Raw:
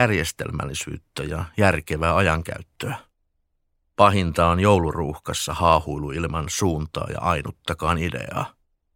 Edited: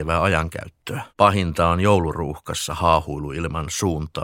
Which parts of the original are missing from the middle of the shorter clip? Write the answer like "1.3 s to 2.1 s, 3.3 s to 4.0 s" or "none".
3.0 s to 3.9 s